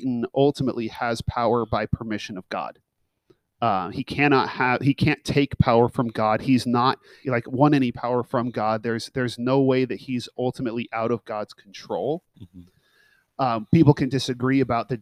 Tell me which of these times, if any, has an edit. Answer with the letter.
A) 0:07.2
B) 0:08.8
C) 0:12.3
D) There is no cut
A